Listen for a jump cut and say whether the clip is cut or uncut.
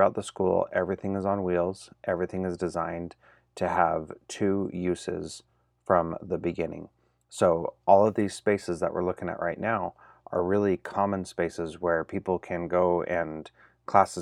uncut